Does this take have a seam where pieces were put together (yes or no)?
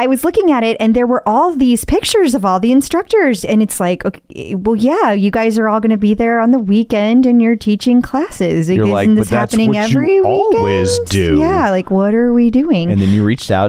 no